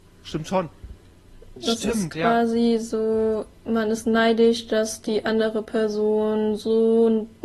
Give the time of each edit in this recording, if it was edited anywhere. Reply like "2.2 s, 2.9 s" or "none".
1.6 s